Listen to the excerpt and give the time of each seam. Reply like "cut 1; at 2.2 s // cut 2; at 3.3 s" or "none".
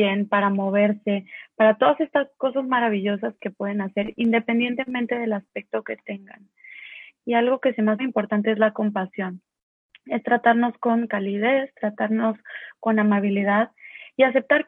cut 1; at 8.0 s